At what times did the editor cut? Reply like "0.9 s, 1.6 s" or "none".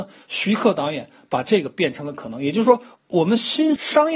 none